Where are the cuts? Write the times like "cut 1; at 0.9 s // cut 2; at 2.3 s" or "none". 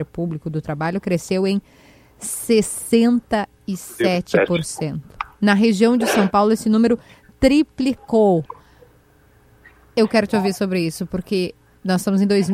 none

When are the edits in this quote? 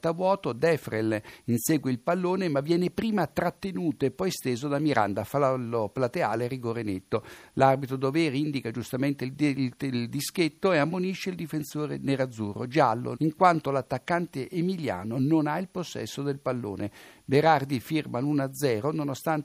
cut 1; at 13.1 s

